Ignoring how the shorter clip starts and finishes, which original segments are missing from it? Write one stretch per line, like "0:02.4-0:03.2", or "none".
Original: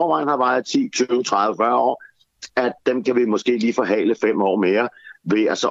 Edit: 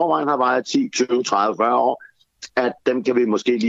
none